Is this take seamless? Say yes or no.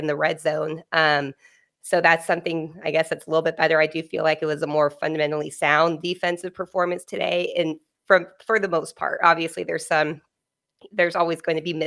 yes